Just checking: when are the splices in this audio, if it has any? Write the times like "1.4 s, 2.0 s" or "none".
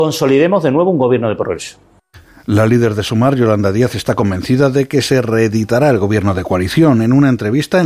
none